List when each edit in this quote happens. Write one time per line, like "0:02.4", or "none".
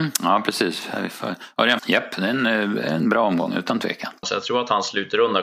0:01.8
0:04.2